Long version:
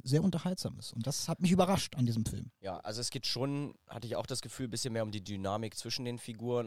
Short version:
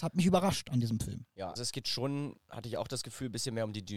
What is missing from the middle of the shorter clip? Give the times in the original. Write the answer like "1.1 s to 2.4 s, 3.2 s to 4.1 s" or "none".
2.8 s to 2.9 s

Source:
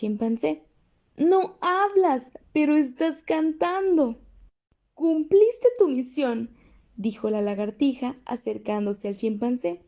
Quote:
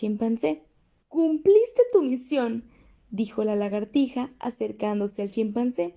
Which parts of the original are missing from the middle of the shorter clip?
1.0 s to 4.9 s

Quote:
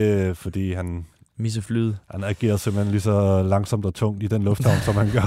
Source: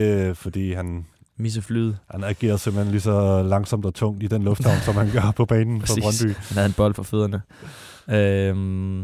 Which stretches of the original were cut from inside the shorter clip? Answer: none

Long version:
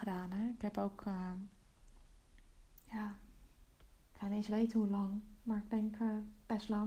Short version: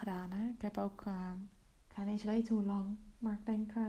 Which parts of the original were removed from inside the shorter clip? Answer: 1.7 s to 4.0 s

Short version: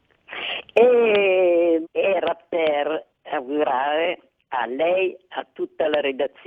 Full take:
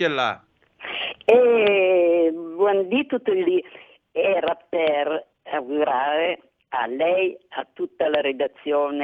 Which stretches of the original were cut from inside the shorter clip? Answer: 2.3 s to 4.0 s

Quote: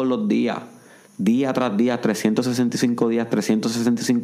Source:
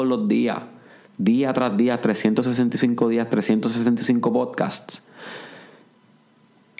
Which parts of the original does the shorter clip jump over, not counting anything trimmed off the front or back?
none

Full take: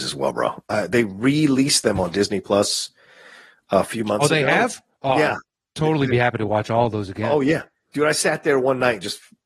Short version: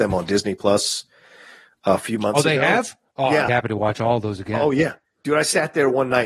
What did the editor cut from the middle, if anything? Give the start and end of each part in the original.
5.3 s to 6.2 s

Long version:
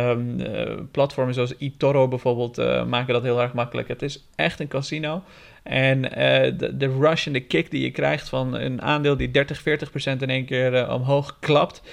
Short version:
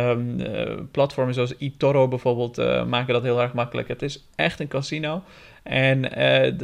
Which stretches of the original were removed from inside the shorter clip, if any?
none

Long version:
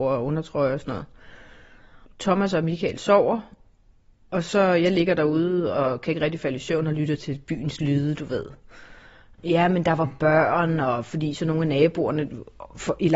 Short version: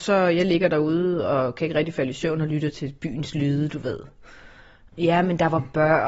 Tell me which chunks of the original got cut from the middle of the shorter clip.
none

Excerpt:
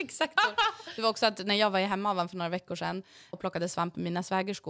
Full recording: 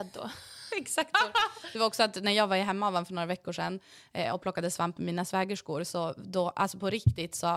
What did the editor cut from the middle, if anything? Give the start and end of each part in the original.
4.1 s to 4.4 s

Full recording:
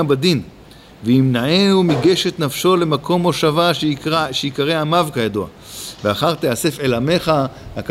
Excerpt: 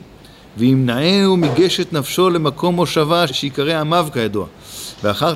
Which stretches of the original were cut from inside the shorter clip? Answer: 3.7 s to 4.3 s

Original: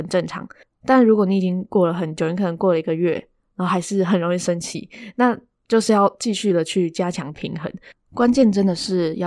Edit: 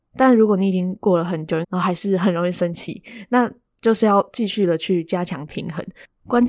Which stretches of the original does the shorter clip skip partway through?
2.3 s to 3.5 s

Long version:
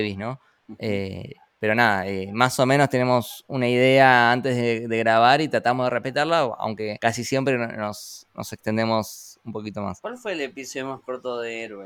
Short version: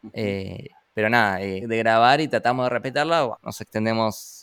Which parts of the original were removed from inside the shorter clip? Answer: 2.3 s to 4.8 s, 6.6 s to 8.3 s

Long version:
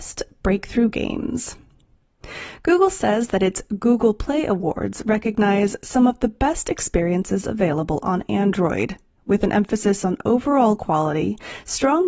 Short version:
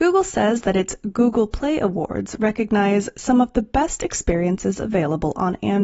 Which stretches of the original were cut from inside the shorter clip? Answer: none

